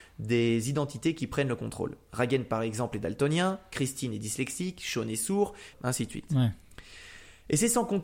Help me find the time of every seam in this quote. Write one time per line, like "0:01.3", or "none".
0:05.7